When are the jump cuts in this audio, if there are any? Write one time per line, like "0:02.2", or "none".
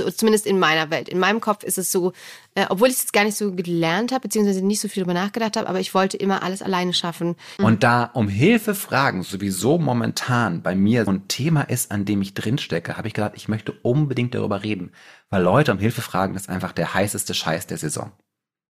0:07.6
0:11.1